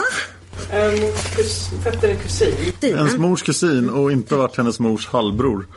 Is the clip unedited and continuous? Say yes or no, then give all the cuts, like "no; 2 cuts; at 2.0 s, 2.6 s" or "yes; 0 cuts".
no; 1 cut; at 2.8 s